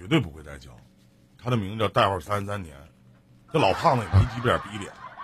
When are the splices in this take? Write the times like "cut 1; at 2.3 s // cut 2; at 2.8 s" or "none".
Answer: cut 1; at 1.4 s